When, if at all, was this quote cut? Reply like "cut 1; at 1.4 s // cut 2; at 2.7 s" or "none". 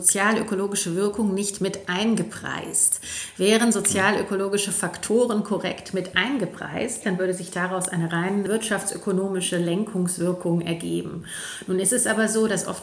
cut 1; at 7.0 s